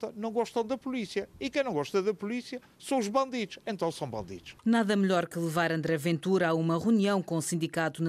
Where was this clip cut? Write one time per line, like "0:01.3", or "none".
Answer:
0:04.6